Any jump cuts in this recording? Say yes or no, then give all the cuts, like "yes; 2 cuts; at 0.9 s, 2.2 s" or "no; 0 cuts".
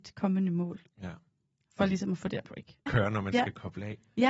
yes; 1 cut; at 2.9 s